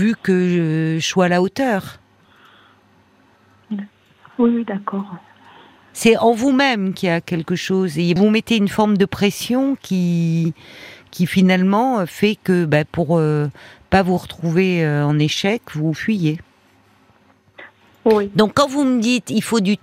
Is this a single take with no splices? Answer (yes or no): no